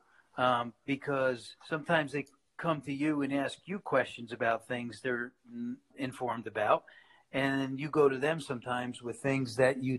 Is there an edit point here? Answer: yes; 2 cuts; at 1.6 s, 5.9 s

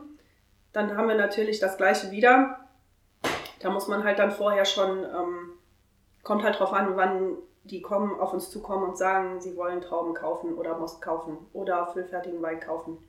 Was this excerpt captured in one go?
yes; 0 cuts

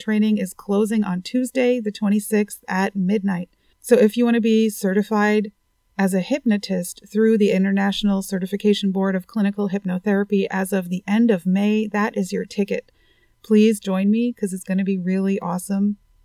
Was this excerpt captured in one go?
yes; 0 cuts

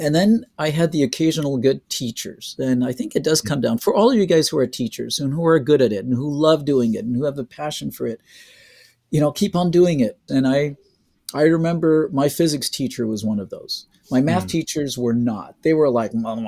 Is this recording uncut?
no; 1 cut; at 10.3 s

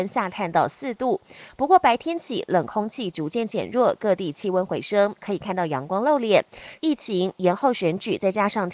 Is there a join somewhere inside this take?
yes; 1 cut; at 6.8 s

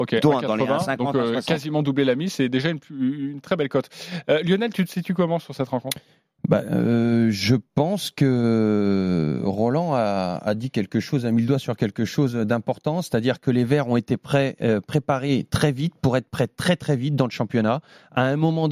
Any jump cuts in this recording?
no; 0 cuts

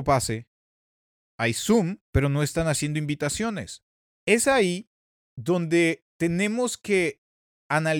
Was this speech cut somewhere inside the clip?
yes; 2 cuts; at 2.0 s, 4.1 s

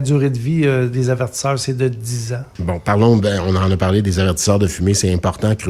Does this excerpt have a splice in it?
yes; 1 cut; at 2.6 s

